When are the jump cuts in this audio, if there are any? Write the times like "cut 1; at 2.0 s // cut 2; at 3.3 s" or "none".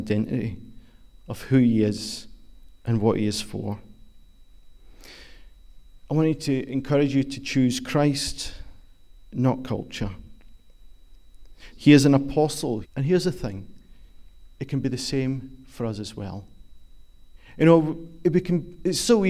cut 1; at 11.7 s // cut 2; at 12.8 s

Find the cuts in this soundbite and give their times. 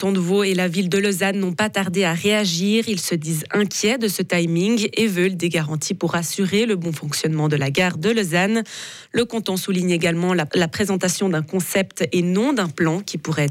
cut 1; at 10.5 s

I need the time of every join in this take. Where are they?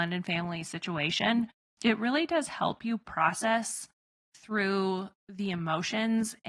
cut 1; at 1.6 s

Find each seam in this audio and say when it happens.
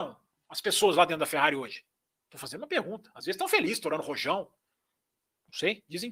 none

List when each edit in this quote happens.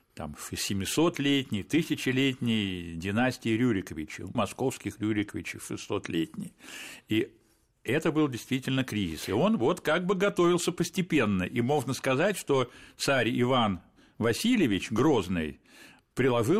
cut 1; at 4.3 s

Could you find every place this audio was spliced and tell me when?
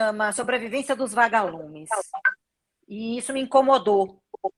cut 1; at 2.8 s

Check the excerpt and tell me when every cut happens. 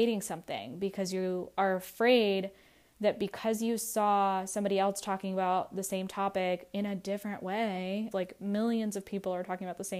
cut 1; at 8.1 s

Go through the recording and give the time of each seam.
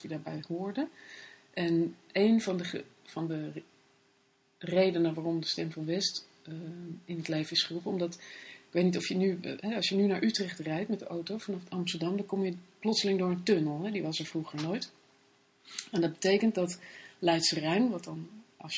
none

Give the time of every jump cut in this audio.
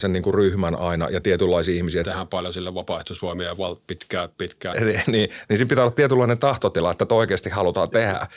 cut 1; at 2.0 s // cut 2; at 4.7 s

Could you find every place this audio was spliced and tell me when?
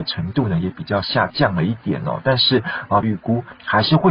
cut 1; at 3.0 s

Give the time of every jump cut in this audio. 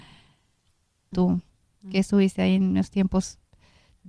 cut 1; at 1.1 s

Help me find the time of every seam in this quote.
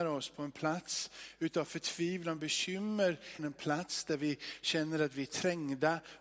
cut 1; at 3.4 s

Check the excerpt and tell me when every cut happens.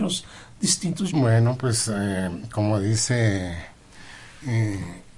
cut 1; at 1.1 s

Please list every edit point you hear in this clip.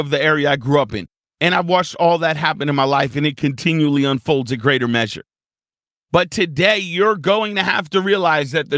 none

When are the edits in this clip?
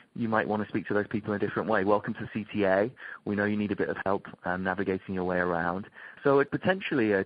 cut 1; at 6.1 s

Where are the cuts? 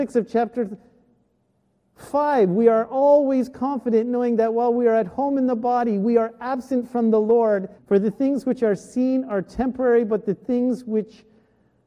cut 1; at 7.8 s

